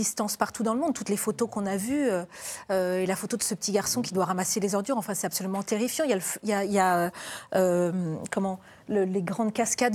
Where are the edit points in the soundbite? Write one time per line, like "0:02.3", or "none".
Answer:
none